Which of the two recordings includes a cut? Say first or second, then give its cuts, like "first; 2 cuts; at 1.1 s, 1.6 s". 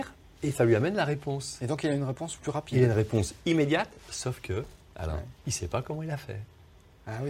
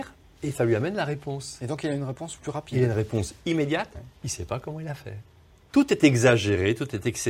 second; 2 cuts; at 3.9 s, 5.7 s